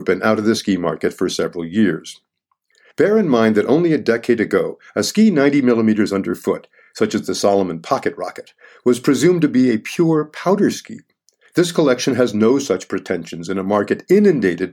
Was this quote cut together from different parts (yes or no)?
no